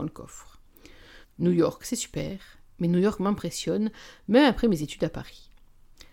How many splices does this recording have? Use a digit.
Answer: 1